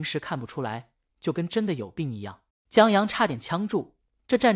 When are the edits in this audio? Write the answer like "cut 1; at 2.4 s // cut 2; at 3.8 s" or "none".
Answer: cut 1; at 1.1 s // cut 2; at 2.5 s